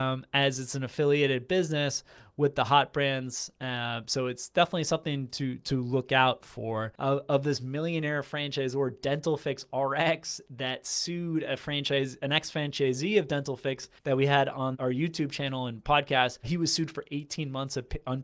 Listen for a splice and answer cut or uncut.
cut